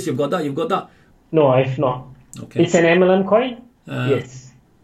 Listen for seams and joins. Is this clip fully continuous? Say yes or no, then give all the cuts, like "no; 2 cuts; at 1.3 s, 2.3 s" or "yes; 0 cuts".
no; 2 cuts; at 1.1 s, 3.8 s